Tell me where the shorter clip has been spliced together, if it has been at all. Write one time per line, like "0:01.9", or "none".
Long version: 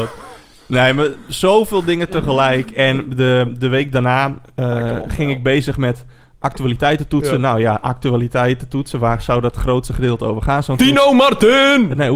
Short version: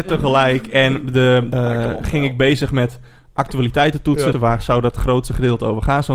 0:01.5
0:04.3